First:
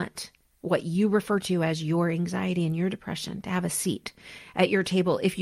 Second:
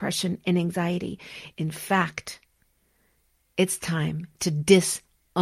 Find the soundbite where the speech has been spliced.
second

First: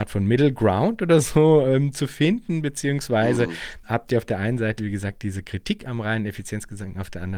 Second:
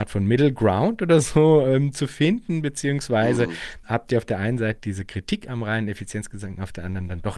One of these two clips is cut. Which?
second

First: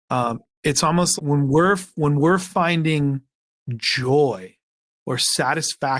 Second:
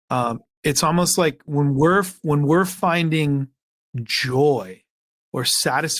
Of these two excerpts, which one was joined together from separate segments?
first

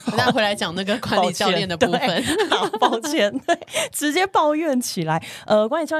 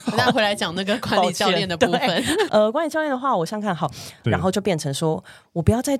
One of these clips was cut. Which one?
second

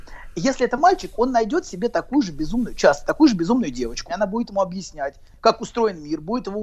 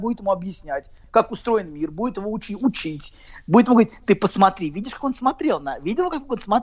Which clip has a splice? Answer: first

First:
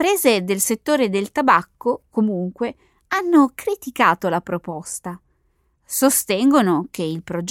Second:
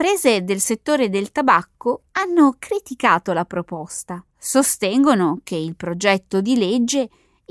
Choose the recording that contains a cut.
second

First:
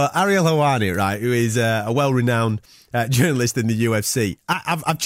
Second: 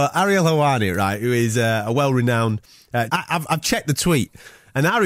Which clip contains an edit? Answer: second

